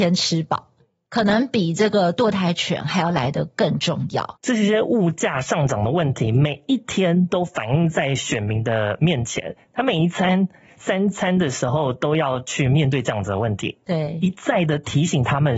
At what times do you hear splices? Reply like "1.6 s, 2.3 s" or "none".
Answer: none

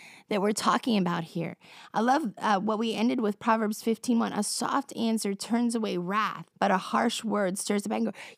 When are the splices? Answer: 6.5 s

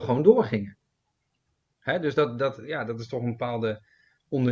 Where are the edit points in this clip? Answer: none

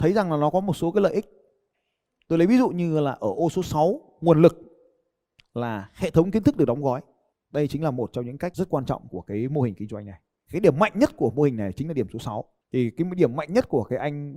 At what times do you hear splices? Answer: none

